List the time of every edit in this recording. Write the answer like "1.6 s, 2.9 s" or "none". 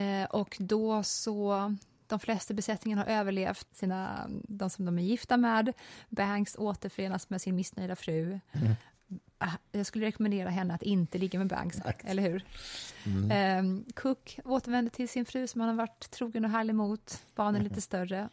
3.7 s, 11.8 s